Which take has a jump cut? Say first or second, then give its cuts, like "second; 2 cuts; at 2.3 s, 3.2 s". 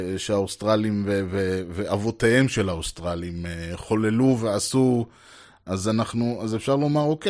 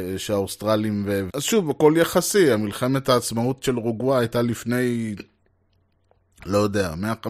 second; 1 cut; at 1.3 s